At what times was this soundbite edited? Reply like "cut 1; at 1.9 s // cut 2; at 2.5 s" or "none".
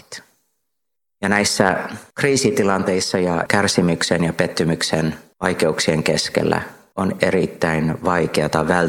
cut 1; at 7.2 s